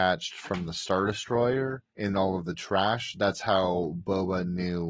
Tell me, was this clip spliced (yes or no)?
no